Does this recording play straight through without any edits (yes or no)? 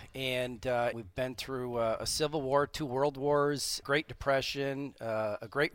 no